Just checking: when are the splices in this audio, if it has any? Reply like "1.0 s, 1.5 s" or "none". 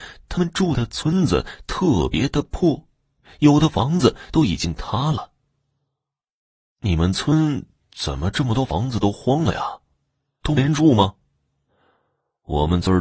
none